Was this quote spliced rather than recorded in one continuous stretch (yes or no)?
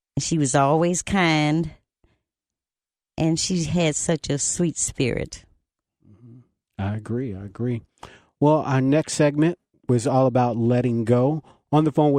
no